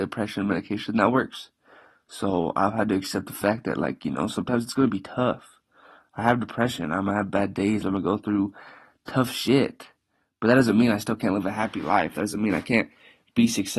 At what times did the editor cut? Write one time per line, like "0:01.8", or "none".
0:07.8